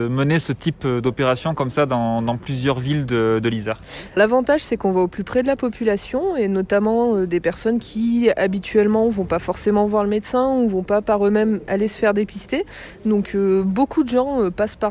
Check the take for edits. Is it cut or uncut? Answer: cut